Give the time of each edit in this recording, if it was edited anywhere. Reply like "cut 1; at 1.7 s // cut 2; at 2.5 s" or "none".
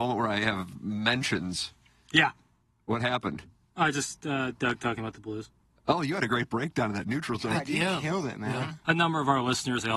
cut 1; at 8.8 s